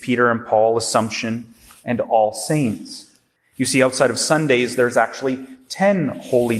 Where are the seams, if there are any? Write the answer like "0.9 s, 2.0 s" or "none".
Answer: 3.4 s

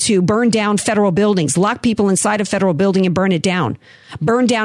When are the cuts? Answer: none

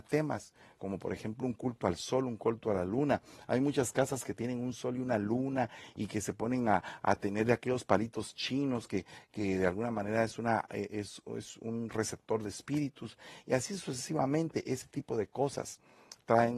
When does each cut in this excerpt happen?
none

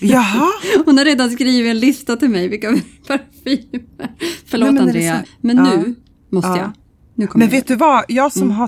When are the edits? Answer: 5.2 s

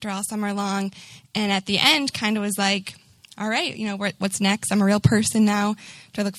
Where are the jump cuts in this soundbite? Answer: none

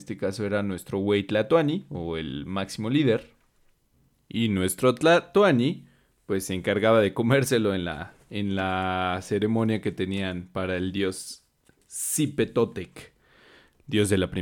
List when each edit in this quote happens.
none

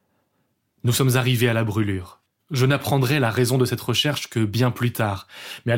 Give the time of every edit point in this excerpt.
2.4 s

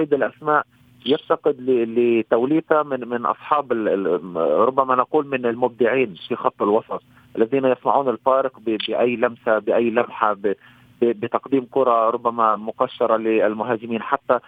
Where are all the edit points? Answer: none

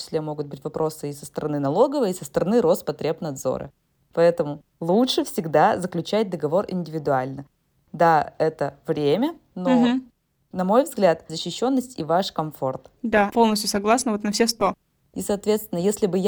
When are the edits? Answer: 11.3 s, 13.0 s, 15.1 s

